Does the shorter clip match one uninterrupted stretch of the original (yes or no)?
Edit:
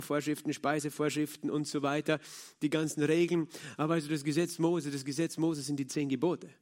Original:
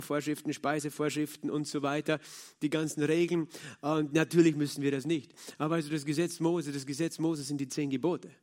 no